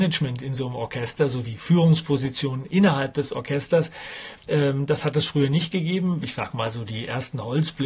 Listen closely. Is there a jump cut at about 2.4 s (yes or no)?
no